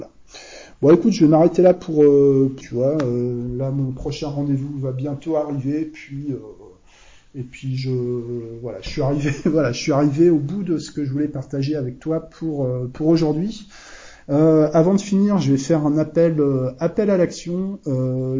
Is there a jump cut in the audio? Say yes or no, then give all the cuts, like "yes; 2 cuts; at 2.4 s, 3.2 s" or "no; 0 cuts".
yes; 1 cut; at 2.6 s